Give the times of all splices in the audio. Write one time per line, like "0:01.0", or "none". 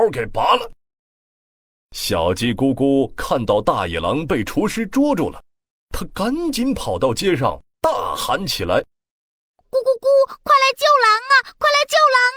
none